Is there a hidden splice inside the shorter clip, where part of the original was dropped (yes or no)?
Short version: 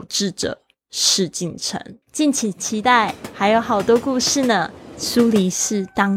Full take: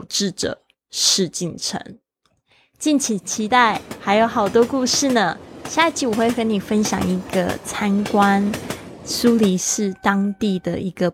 yes